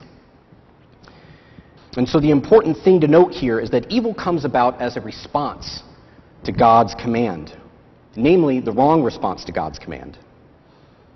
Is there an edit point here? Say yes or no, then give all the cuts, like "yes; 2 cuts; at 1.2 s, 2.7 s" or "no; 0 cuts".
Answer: yes; 1 cut; at 1.8 s